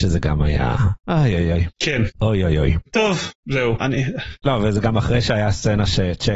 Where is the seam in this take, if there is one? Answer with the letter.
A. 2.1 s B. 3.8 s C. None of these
B